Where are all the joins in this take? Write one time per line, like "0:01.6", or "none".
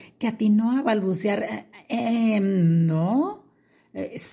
none